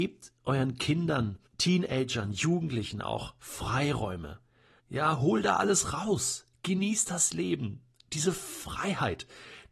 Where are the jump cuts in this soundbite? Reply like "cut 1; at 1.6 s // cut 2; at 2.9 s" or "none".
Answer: cut 1; at 1.5 s // cut 2; at 4.8 s